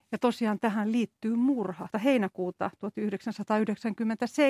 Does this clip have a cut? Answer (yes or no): yes